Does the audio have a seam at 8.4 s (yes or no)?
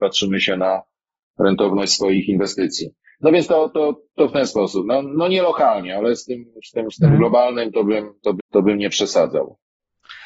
yes